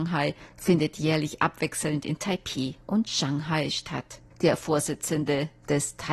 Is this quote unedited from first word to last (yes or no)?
yes